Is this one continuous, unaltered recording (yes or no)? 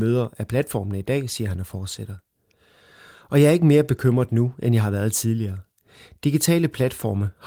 yes